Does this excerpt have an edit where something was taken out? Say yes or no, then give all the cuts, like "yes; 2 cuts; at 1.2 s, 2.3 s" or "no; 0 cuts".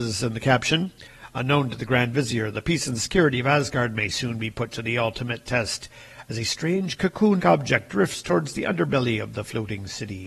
yes; 1 cut; at 7.4 s